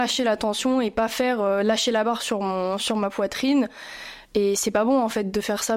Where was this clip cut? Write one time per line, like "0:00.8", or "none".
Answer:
0:04.2